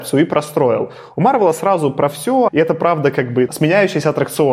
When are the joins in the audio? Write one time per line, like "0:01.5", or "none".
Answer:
0:02.5
0:03.5